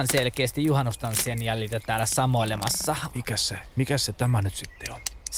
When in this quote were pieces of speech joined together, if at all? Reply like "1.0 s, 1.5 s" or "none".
3.1 s